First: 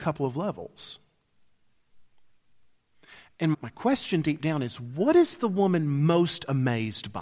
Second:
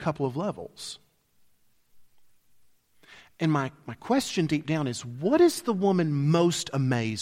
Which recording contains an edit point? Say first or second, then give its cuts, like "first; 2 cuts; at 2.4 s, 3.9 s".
first; 1 cut; at 3.5 s